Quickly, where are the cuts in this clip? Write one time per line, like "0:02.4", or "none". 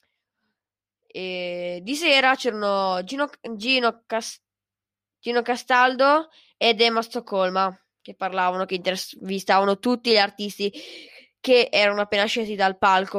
none